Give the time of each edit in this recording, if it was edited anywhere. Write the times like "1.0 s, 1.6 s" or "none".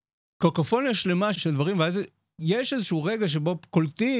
1.3 s